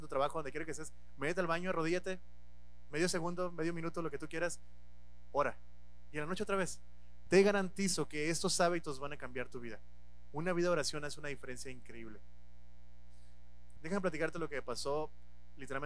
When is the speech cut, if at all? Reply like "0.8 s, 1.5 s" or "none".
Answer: 7.3 s, 13.8 s